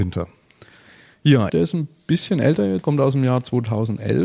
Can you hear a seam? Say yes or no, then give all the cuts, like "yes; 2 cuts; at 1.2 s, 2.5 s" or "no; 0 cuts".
yes; 2 cuts; at 1.5 s, 2.8 s